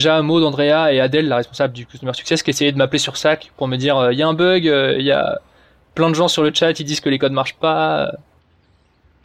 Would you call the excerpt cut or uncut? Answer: uncut